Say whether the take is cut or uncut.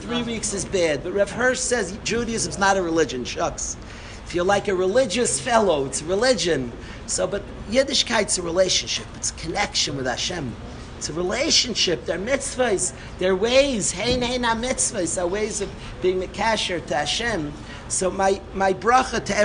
uncut